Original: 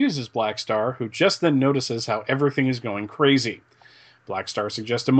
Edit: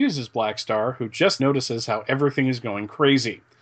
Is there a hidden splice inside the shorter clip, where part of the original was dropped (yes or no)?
yes